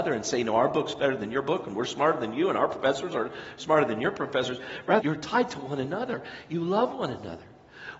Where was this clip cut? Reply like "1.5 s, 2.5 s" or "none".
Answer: 5.0 s